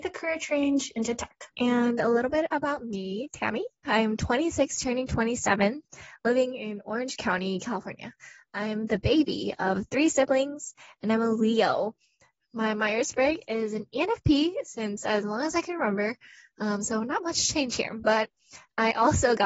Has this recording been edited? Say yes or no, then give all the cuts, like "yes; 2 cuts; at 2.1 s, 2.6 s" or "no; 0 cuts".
yes; 1 cut; at 1.5 s